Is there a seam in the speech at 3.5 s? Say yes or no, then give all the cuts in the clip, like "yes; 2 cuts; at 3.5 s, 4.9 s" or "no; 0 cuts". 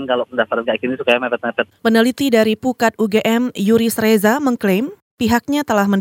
no; 1 cut; at 1.8 s